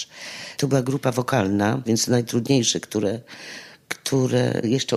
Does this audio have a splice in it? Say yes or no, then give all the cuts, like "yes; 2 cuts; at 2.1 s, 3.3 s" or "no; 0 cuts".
yes; 1 cut; at 1.8 s